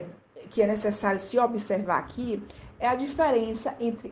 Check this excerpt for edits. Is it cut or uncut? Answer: uncut